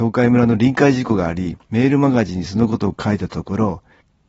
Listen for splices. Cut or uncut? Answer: cut